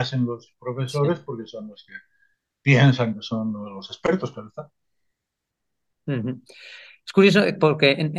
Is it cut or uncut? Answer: uncut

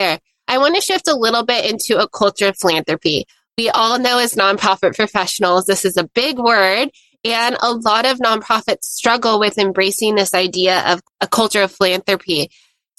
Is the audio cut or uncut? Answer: uncut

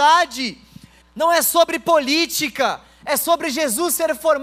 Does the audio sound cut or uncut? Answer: cut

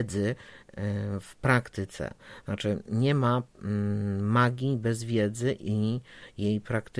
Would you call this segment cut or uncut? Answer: uncut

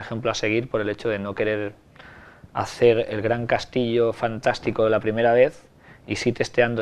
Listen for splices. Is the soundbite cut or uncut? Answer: uncut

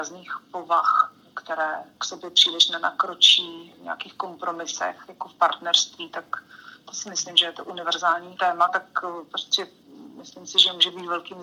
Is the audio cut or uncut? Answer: cut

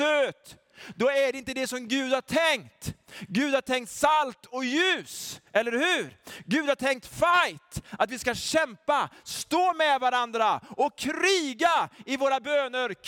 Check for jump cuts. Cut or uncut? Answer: uncut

